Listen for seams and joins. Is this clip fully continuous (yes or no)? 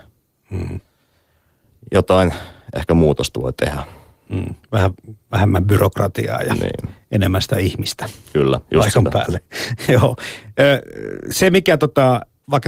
yes